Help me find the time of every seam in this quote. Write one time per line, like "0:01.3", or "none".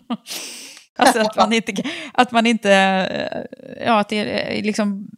0:01.0